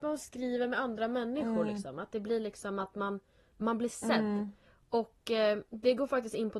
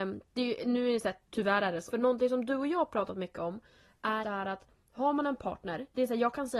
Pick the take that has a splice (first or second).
second